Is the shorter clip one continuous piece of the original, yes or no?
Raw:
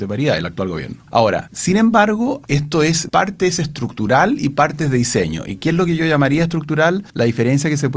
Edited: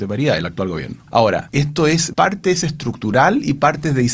no